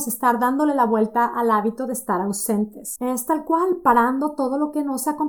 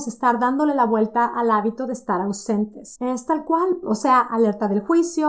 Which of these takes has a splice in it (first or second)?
second